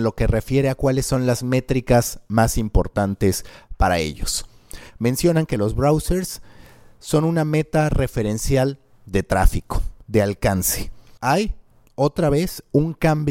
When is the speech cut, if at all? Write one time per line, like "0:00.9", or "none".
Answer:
0:11.2